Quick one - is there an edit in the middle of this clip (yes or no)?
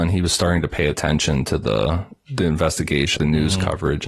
yes